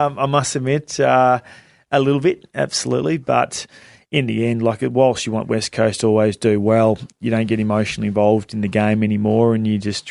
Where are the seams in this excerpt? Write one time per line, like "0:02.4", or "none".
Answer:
none